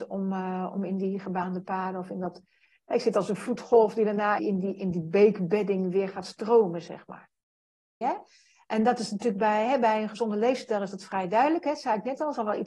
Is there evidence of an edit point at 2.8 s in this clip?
no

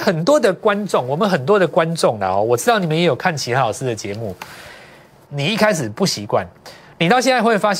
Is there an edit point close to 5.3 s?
yes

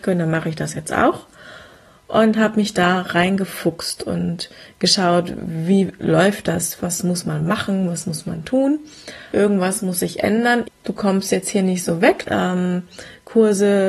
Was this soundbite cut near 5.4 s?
no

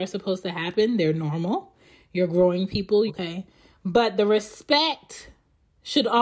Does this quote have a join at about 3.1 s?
yes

